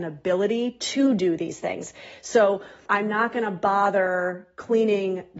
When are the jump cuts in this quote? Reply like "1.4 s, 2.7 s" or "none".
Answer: 2.9 s